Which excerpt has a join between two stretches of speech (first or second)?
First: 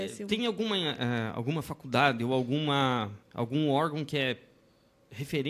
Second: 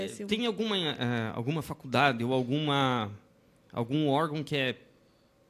first